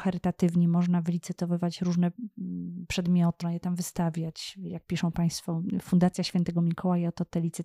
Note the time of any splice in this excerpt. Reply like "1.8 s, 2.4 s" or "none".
3.4 s